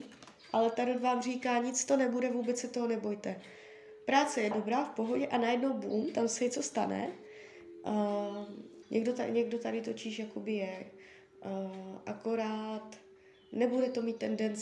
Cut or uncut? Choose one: cut